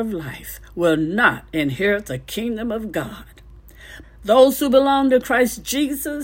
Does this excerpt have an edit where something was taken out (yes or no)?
yes